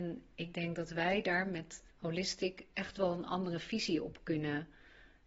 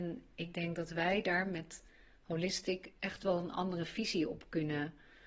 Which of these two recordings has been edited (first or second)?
first